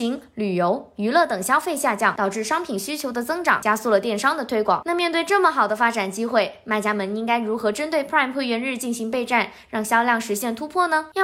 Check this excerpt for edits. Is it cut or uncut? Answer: uncut